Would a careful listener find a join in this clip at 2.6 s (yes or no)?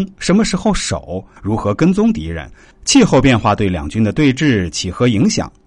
yes